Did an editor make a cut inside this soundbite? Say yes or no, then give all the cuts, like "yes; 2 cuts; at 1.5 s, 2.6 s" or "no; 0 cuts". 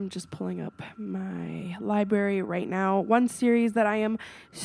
no; 0 cuts